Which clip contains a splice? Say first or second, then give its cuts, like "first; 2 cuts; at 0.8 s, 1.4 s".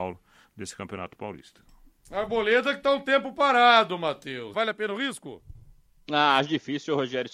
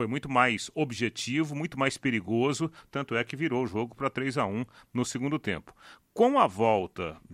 first; 1 cut; at 4.5 s